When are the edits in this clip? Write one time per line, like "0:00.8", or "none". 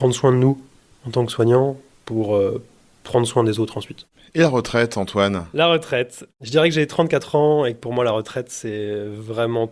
none